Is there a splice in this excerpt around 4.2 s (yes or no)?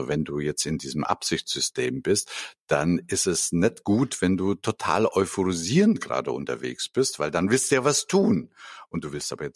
no